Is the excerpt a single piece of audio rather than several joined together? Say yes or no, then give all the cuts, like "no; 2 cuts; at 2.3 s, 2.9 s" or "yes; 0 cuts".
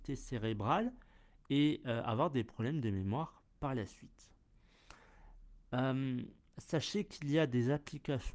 yes; 0 cuts